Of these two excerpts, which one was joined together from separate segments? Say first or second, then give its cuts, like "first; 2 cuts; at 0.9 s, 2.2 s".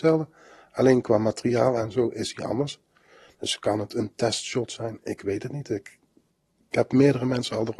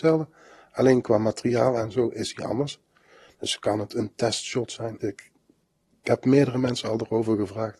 second; 1 cut; at 5.0 s